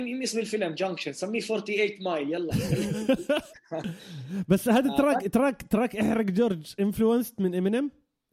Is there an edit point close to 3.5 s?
yes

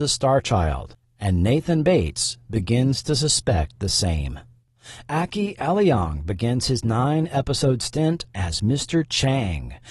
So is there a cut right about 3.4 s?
no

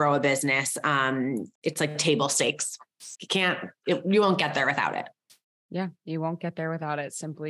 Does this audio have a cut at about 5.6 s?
no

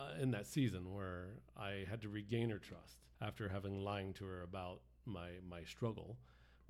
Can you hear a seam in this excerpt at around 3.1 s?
yes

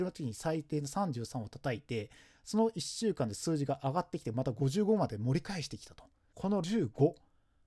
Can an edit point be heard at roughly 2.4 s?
no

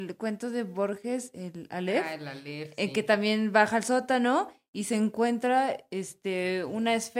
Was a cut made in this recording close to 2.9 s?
no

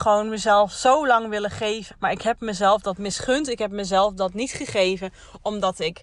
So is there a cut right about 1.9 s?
yes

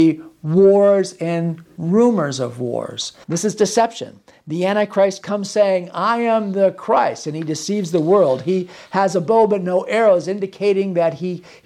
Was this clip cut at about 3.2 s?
yes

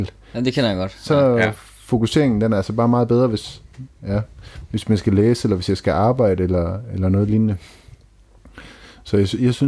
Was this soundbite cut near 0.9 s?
no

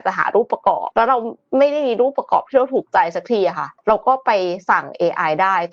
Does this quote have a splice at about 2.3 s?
no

